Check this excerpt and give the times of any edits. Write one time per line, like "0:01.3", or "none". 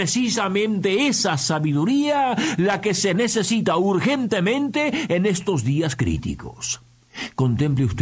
none